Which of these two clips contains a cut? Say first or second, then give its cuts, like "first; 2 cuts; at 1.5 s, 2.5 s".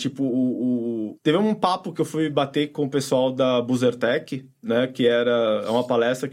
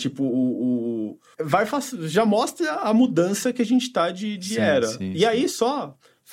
first; 1 cut; at 1.2 s